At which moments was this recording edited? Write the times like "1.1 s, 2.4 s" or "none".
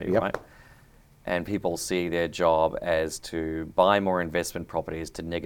none

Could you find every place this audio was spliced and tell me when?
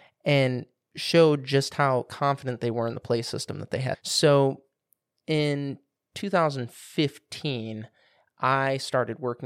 3.9 s

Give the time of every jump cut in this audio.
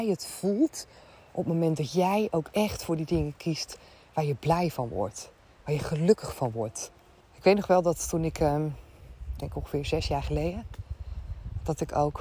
7.2 s, 9.4 s

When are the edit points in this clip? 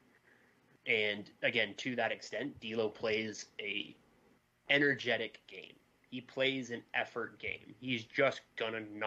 none

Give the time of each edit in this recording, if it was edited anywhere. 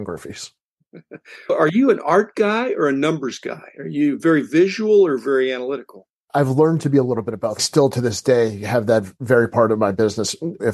7.6 s

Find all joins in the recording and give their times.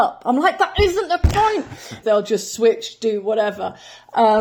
2.0 s

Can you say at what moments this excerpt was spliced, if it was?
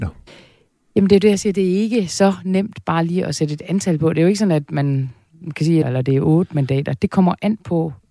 5.8 s

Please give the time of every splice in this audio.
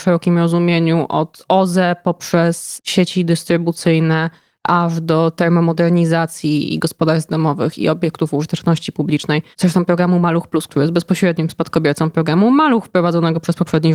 9.5 s

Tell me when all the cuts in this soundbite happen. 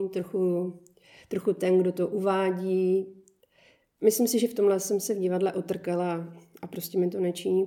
none

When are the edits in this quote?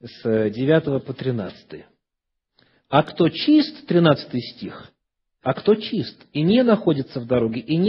2.7 s

